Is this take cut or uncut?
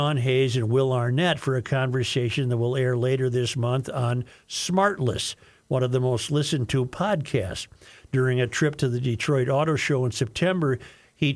uncut